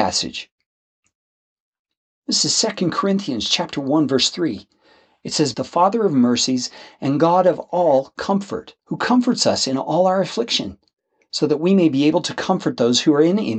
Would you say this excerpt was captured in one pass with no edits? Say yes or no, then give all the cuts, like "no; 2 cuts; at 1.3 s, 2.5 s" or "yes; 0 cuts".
no; 2 cuts; at 5.5 s, 8.8 s